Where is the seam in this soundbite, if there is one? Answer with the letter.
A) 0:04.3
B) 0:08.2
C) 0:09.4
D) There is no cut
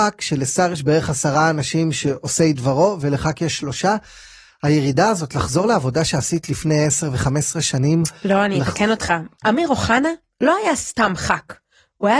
C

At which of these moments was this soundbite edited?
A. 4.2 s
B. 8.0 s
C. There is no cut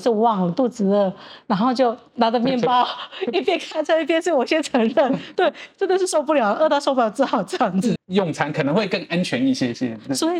B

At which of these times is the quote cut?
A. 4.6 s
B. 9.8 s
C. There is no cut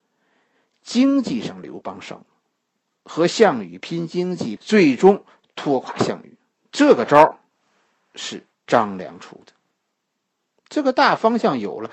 A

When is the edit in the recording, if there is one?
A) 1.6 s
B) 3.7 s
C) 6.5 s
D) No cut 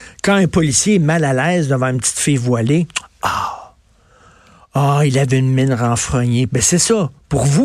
C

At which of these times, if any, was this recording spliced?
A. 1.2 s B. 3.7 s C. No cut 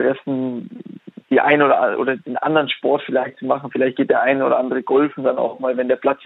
A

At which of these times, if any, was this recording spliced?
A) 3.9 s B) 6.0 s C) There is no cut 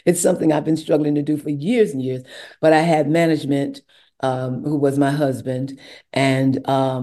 C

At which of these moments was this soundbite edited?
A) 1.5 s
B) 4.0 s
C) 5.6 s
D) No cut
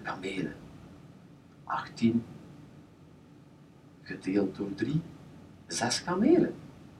A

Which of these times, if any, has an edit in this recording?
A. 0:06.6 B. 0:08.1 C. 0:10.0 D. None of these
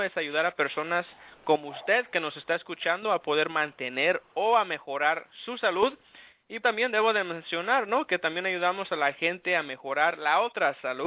A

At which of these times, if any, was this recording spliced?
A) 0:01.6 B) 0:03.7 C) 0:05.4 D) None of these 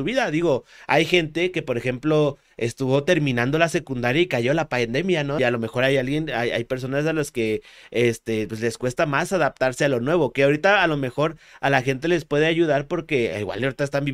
C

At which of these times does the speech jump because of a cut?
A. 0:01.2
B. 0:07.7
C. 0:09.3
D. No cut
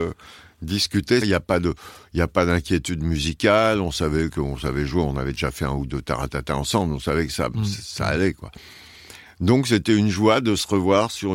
A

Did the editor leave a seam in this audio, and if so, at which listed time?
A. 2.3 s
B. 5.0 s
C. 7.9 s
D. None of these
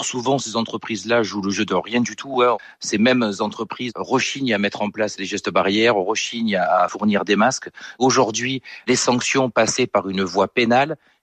D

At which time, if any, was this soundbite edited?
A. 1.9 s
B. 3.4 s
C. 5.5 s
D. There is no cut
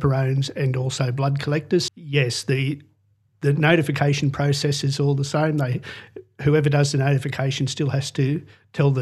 A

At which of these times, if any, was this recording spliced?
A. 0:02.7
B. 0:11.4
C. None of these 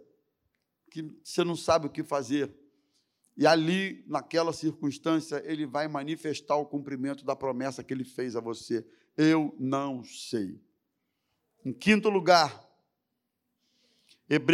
C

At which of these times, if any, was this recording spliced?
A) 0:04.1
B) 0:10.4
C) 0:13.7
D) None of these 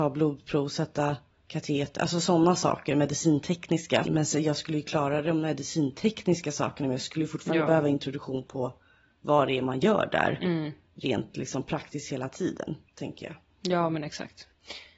A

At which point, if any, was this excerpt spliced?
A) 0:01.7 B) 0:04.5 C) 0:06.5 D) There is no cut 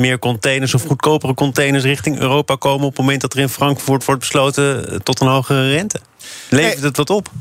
D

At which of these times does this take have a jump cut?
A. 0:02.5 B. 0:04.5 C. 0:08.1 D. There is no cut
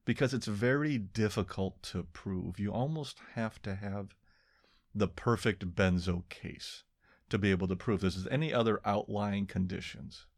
D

